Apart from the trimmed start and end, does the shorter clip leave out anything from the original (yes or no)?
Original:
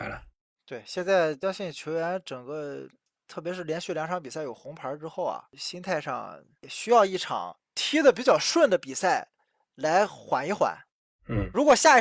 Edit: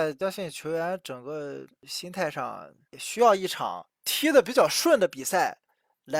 yes